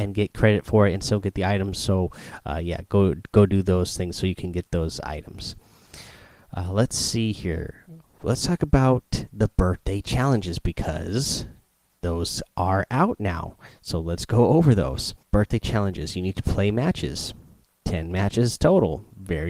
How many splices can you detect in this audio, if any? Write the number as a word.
one